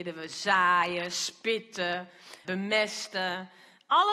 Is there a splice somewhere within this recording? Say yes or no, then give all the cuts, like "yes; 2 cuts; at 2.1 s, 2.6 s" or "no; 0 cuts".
yes; 1 cut; at 2.4 s